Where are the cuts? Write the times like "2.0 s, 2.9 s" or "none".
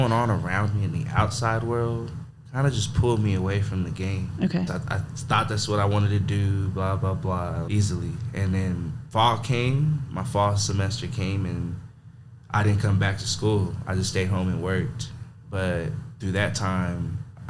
4.7 s, 7.7 s